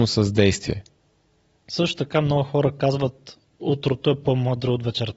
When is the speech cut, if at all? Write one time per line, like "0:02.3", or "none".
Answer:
0:01.6

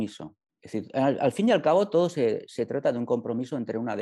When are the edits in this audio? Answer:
none

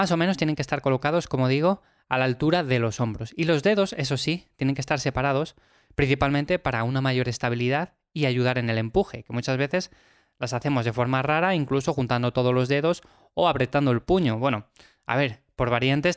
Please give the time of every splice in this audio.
none

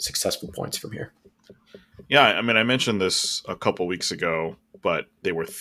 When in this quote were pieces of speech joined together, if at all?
none

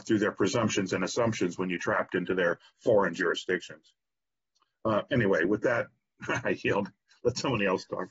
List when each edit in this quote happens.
none

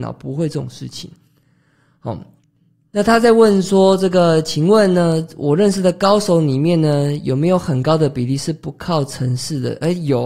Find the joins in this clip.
none

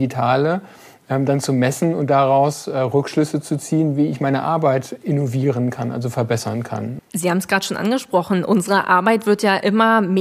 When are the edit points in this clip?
0:07.0

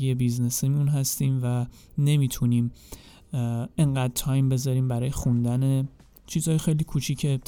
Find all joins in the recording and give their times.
none

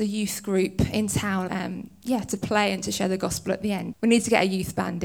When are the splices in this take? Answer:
0:01.5
0:03.9

